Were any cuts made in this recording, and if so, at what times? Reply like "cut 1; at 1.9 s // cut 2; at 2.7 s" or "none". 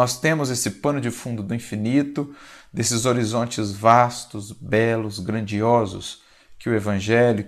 none